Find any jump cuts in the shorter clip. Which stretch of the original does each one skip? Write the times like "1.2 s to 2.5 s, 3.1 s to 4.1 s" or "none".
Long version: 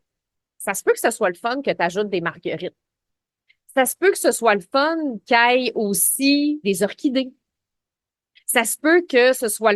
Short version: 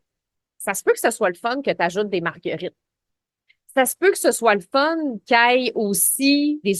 none